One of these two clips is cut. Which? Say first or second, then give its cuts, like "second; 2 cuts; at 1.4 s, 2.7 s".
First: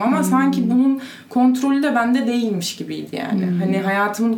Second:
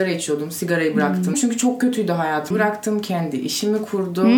second; 2 cuts; at 1.3 s, 2.5 s